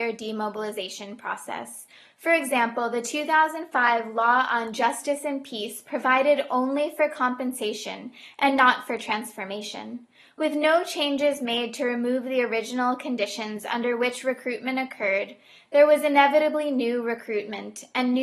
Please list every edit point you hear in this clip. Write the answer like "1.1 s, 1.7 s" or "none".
none

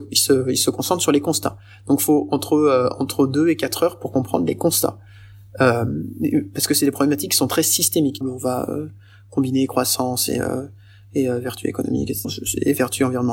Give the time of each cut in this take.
8.2 s, 12.2 s

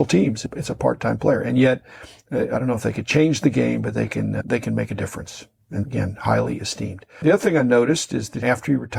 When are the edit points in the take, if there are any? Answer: none

